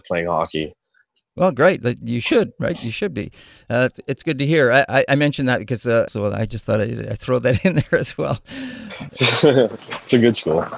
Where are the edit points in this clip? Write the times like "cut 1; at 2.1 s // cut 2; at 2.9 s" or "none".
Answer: cut 1; at 6.1 s // cut 2; at 9.1 s